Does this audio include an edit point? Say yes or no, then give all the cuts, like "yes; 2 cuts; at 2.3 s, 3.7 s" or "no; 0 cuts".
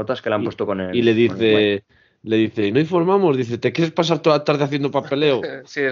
no; 0 cuts